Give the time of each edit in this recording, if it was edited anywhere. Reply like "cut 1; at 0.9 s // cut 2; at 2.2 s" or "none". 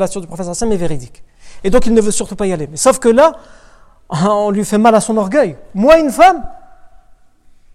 none